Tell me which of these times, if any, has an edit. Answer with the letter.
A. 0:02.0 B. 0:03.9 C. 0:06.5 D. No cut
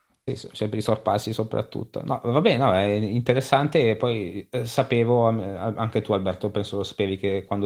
D